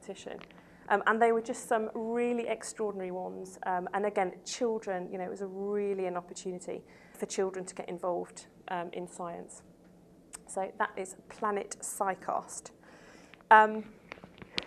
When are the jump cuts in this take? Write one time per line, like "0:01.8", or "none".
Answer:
0:07.1

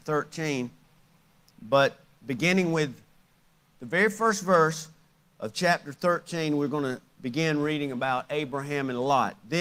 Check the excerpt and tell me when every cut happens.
0:01.5

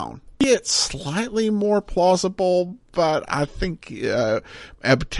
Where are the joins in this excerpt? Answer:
0:03.2

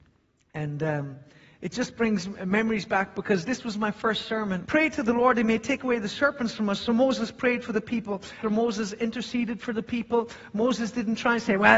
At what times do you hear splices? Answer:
0:04.6
0:08.4

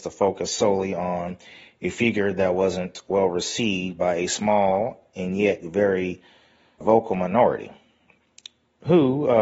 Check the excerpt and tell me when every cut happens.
0:06.8

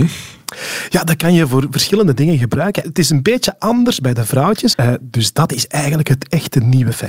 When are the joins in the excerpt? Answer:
0:02.8
0:04.7

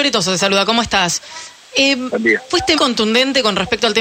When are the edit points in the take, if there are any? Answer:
0:01.7
0:02.8

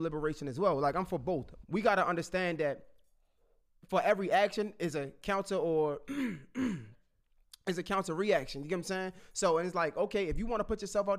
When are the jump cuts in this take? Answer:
0:01.6

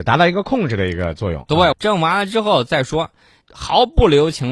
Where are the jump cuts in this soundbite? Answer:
0:01.7
0:03.4

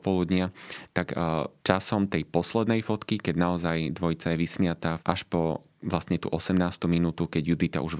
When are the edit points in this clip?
0:01.6
0:05.0

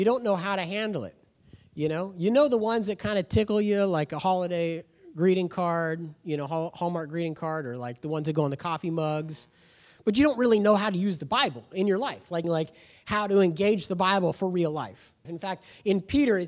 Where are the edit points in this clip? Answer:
0:12.4
0:15.2

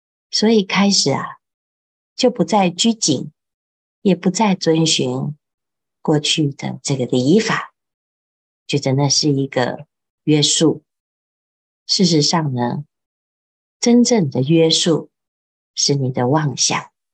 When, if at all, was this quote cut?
0:13.6

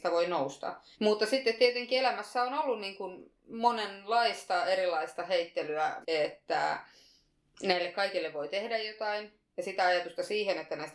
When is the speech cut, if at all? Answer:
0:00.9
0:06.0

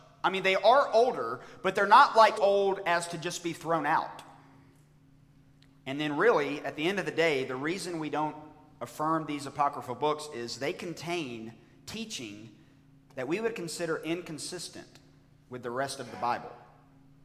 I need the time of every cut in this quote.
0:02.4

